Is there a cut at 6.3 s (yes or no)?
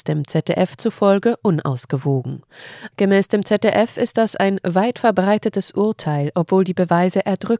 no